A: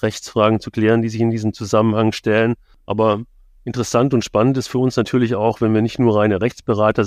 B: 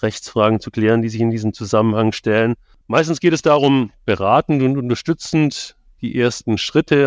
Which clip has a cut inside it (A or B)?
B